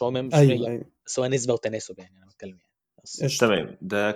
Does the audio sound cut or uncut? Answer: uncut